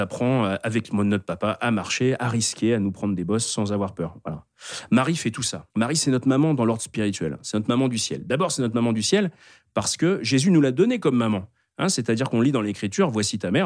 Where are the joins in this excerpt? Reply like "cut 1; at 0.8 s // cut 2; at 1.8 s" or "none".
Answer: cut 1; at 5.7 s